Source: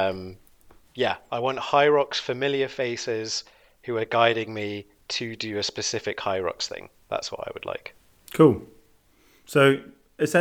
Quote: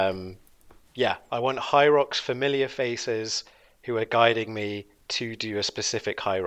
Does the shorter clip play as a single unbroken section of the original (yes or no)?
yes